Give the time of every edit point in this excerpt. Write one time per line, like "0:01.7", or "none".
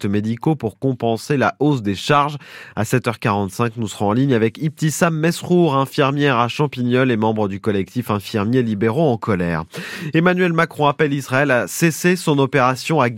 none